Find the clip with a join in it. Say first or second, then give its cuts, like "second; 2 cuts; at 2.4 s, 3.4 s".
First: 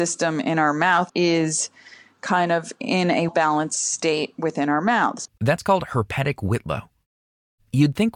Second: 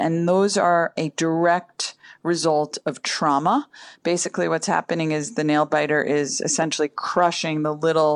first; 3 cuts; at 1.1 s, 3.3 s, 5.3 s